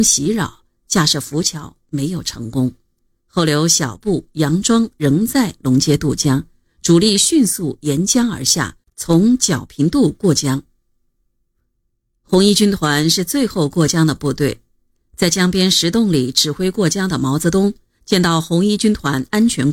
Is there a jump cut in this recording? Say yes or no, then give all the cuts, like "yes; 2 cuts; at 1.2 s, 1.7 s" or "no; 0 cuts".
yes; 1 cut; at 3.2 s